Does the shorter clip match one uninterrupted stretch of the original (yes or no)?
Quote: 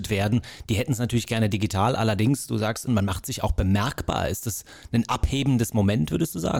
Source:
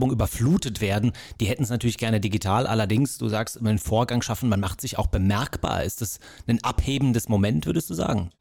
no